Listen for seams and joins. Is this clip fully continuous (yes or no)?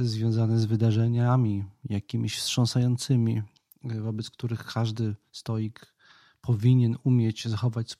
yes